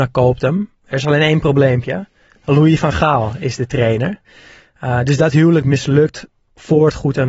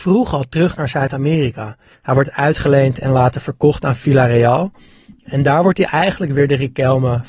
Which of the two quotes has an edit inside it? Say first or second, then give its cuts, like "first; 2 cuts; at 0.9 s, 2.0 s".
second; 1 cut; at 1.9 s